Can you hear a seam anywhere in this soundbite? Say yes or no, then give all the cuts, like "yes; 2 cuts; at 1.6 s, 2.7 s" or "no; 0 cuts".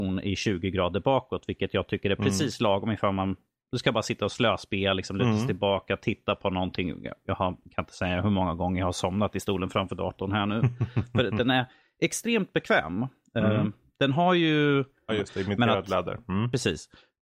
yes; 1 cut; at 15.1 s